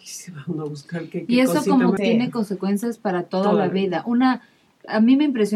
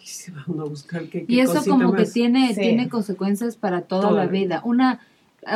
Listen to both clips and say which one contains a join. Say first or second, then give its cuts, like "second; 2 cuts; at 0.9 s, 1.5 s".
first; 1 cut; at 2.0 s